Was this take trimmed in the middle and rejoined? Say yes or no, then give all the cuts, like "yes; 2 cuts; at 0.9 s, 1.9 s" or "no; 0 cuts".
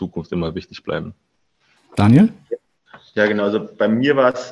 yes; 1 cut; at 1.8 s